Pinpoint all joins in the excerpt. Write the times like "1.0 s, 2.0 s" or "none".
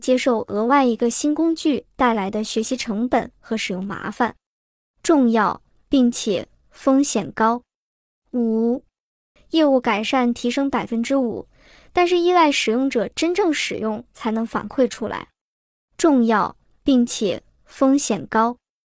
9.4 s